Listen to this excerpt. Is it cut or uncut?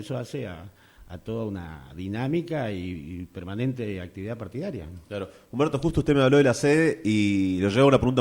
uncut